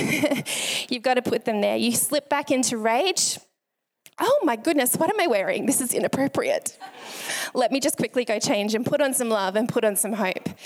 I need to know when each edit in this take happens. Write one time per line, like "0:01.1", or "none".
none